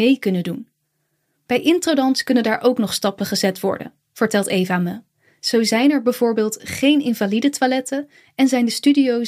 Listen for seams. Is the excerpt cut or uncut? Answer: uncut